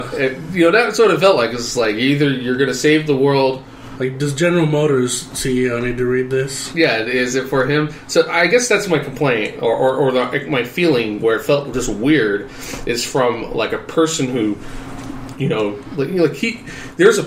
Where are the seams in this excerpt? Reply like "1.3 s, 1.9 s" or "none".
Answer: none

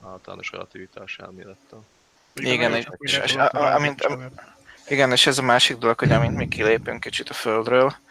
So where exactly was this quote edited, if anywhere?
none

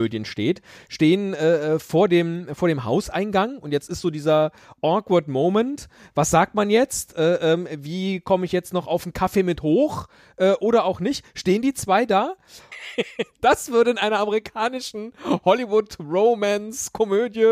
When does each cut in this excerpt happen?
12.7 s

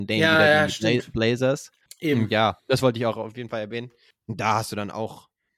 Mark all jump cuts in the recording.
1.9 s, 4.1 s

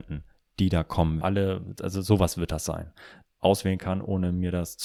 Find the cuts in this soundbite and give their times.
1.2 s, 3.3 s

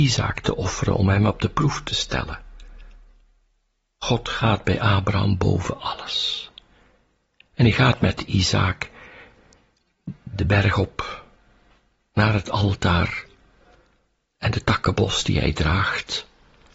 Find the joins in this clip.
none

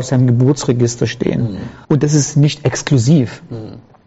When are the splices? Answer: 1.8 s

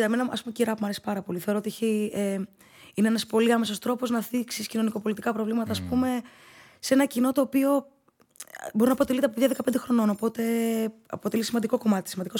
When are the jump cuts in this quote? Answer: none

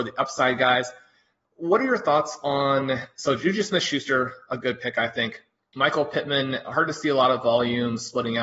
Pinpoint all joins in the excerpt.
none

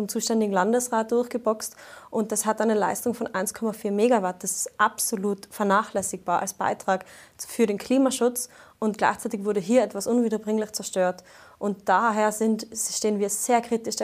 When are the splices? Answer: none

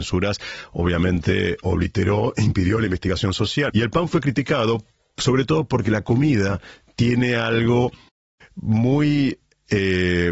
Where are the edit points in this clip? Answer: 3.7 s

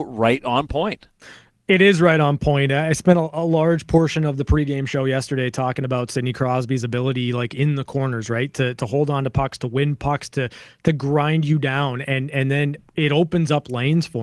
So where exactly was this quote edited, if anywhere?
none

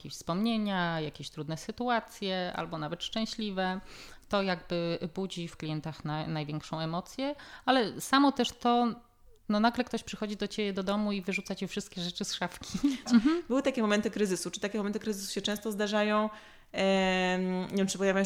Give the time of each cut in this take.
5.5 s, 13.1 s

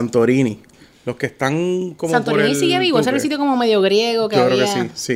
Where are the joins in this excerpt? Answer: none

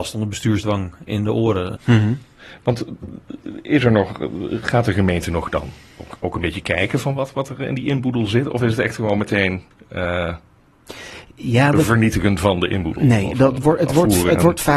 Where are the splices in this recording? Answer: 1.8 s

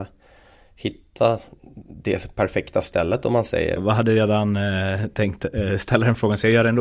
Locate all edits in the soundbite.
3.8 s

